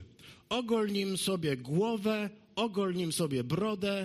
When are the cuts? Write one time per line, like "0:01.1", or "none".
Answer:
none